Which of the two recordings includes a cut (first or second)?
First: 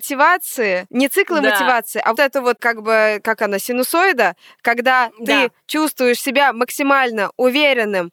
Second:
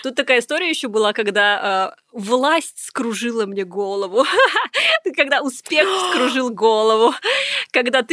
first